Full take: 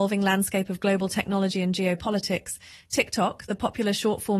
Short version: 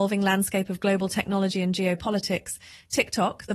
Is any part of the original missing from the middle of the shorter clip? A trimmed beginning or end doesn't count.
no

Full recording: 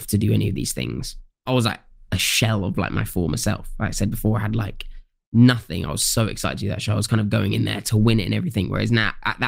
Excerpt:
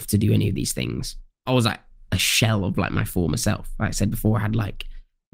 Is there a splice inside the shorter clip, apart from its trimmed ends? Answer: no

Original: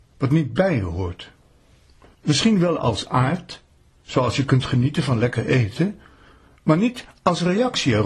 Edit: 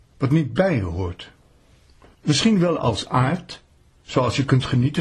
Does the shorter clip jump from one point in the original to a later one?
no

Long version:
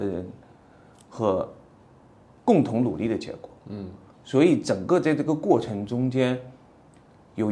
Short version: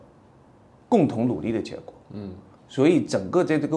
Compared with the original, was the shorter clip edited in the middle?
no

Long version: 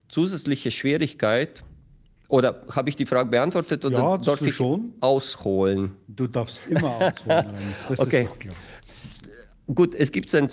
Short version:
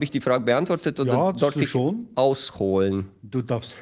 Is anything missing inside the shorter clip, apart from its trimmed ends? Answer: no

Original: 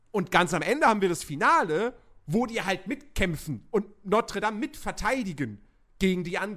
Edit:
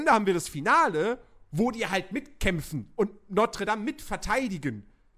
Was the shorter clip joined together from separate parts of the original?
no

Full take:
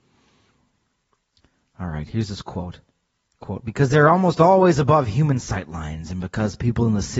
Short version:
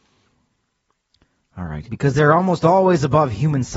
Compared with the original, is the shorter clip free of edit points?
no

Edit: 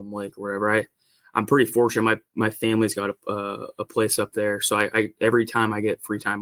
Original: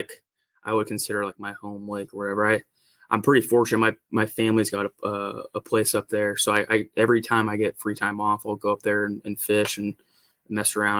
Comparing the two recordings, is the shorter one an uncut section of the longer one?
yes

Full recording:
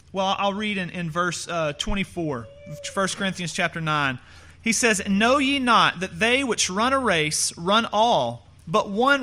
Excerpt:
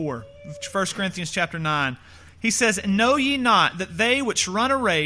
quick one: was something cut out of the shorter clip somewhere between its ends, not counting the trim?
no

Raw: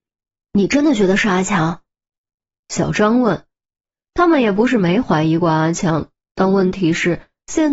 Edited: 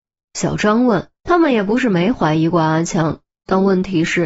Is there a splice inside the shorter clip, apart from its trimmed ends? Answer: yes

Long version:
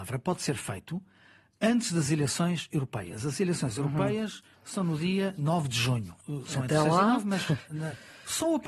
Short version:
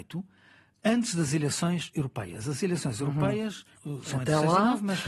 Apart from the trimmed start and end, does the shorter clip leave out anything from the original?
yes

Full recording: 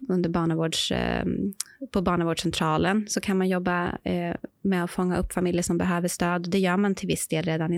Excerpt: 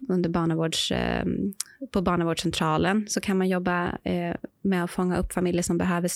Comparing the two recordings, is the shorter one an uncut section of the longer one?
yes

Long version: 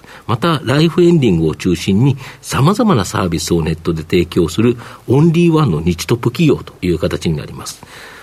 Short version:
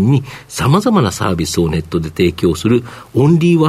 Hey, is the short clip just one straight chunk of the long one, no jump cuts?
yes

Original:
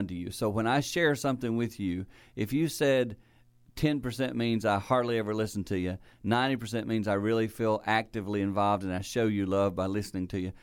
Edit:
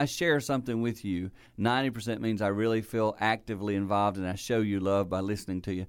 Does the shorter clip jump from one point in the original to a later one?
yes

